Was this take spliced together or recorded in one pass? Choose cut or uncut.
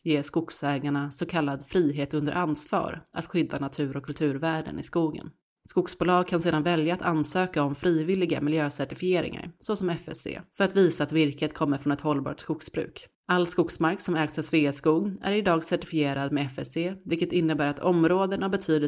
uncut